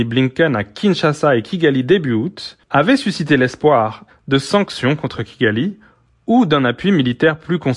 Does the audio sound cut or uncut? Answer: cut